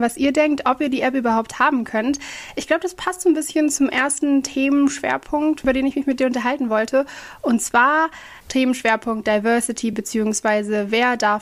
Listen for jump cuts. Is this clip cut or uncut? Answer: uncut